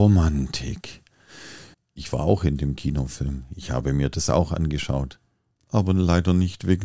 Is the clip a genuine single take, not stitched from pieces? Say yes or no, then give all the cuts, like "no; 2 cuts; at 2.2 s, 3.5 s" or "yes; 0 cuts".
no; 1 cut; at 1.7 s